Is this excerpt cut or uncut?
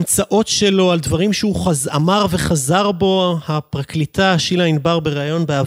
uncut